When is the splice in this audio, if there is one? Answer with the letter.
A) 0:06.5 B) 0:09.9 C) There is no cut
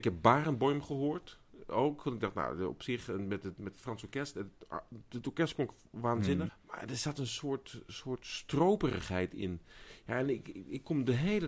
A